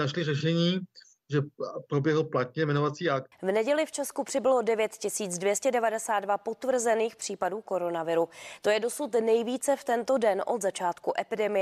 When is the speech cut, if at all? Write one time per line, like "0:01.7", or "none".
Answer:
0:01.1
0:03.3